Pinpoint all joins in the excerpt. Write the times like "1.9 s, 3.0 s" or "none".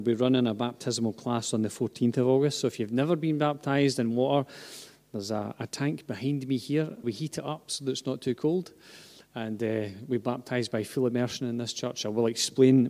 7.0 s